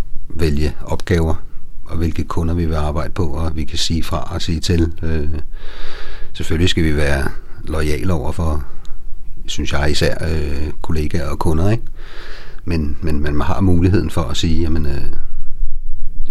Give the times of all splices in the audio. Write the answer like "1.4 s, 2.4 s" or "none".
none

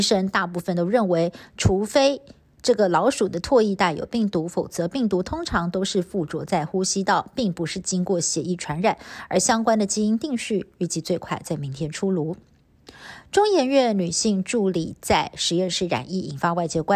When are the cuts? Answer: none

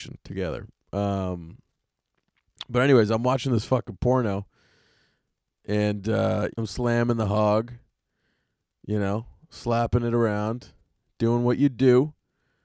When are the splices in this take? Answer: 6.5 s

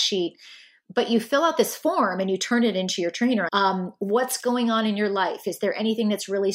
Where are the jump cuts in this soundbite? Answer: 3.5 s

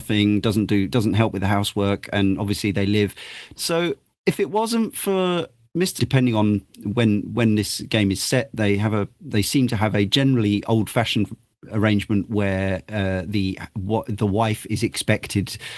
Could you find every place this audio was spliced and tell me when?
3.6 s, 6.0 s, 9.1 s

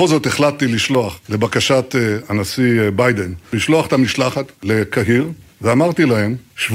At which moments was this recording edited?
none

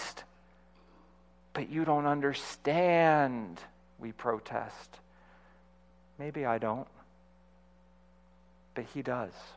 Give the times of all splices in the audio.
none

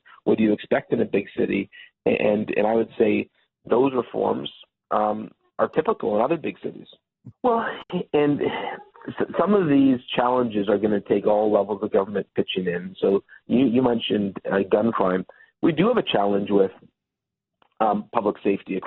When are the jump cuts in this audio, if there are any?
7.3 s

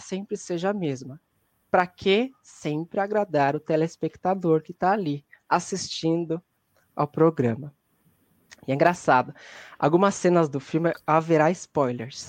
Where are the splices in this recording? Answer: none

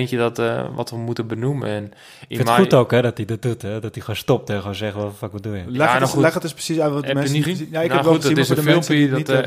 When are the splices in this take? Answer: 7.5 s

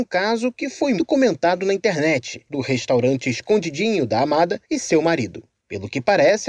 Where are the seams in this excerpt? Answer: 1.0 s, 2.5 s

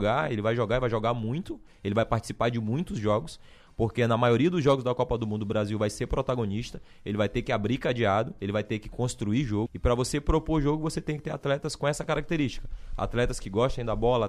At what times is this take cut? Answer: 9.7 s

